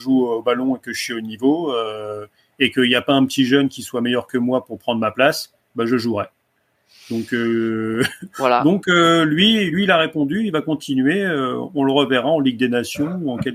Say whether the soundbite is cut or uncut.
uncut